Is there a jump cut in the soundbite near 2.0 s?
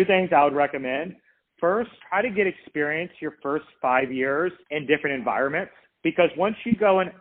yes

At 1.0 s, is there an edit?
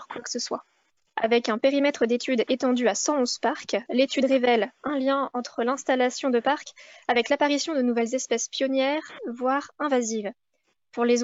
yes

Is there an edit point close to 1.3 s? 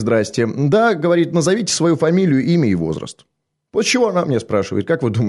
no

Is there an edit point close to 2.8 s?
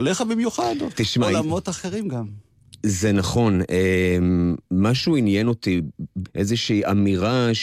no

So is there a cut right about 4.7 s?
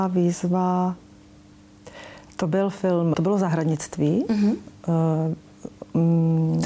no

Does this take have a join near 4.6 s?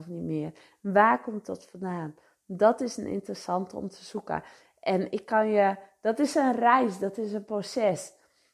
no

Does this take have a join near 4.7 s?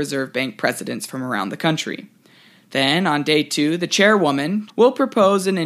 yes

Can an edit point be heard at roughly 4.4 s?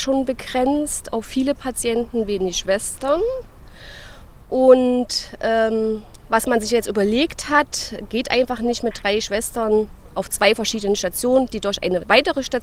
no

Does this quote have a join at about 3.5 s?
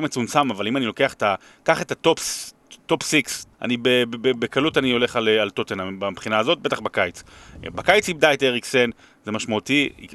yes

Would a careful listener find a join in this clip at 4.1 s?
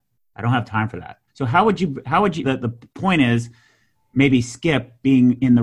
no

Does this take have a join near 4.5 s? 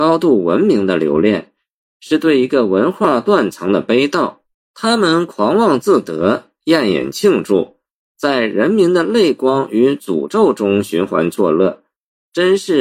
yes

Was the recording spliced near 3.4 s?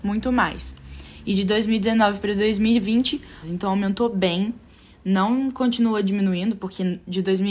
yes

